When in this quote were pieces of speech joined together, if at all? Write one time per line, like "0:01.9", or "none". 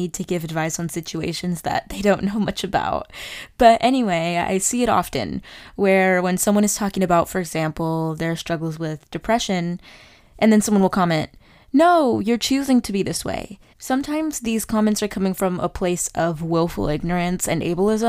0:13.7